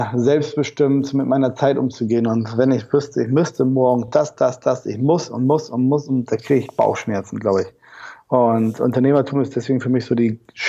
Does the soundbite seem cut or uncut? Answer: uncut